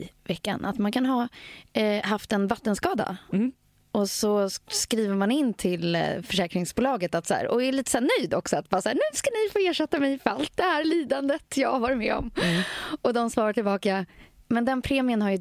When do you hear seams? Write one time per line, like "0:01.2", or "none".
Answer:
none